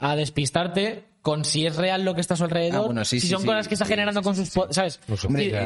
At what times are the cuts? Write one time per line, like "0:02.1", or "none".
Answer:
none